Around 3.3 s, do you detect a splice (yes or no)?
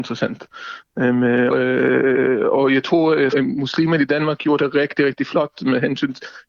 yes